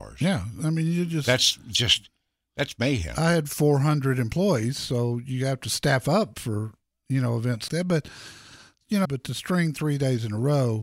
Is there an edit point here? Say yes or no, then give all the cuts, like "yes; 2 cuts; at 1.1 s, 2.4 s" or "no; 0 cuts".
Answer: yes; 2 cuts; at 7.7 s, 9.0 s